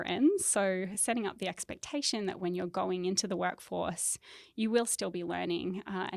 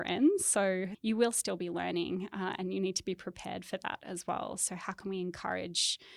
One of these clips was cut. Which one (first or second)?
second